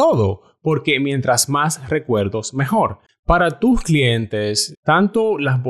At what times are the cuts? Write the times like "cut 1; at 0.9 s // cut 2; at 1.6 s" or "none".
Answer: cut 1; at 3.1 s // cut 2; at 4.8 s